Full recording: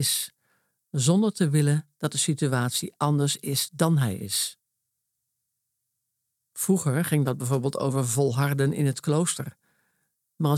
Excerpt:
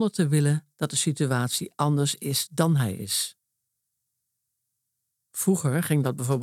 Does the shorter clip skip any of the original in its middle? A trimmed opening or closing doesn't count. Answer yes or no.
no